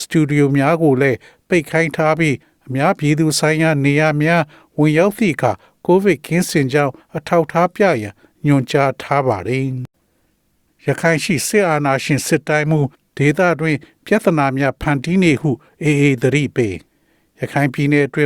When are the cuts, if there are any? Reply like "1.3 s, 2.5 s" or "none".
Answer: none